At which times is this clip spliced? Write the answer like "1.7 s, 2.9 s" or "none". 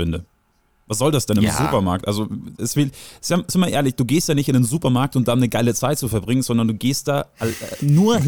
none